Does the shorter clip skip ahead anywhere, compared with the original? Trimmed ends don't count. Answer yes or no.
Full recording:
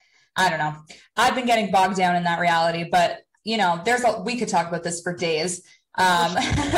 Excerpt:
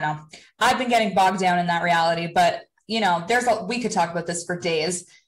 no